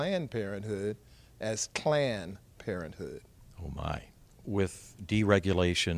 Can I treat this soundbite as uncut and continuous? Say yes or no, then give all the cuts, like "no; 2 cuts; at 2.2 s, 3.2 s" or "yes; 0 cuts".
yes; 0 cuts